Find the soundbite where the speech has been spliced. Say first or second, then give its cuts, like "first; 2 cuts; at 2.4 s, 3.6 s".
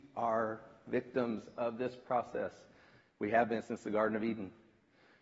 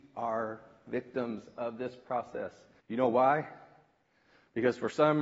second; 1 cut; at 2.8 s